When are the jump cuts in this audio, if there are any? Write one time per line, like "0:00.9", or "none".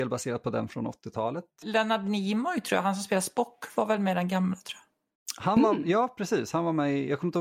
0:01.6